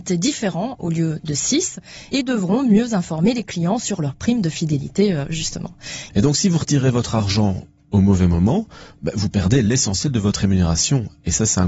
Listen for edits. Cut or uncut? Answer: cut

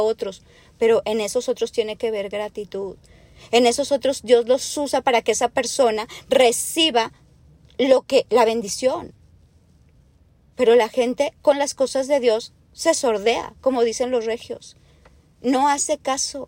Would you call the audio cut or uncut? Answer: uncut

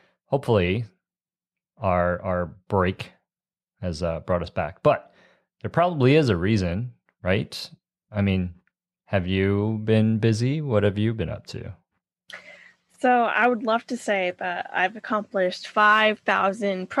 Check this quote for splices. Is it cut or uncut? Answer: uncut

